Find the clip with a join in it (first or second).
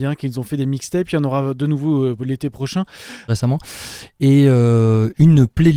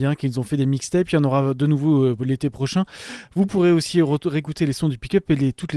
first